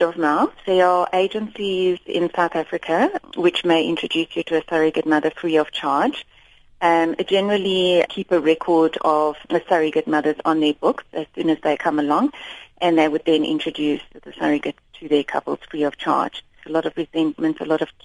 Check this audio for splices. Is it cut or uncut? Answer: cut